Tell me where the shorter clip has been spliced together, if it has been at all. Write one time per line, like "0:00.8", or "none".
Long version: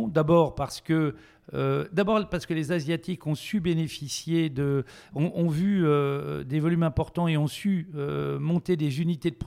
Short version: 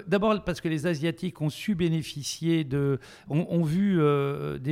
none